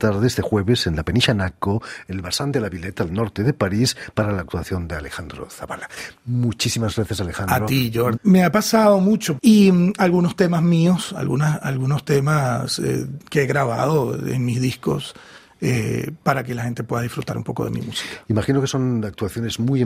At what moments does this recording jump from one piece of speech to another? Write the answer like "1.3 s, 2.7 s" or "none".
8.1 s, 9.4 s